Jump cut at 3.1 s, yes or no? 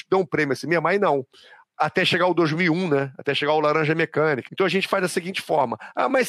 no